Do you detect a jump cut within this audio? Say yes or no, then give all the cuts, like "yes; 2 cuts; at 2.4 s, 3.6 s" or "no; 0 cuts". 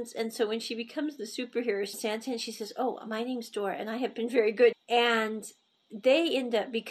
yes; 2 cuts; at 1.9 s, 4.7 s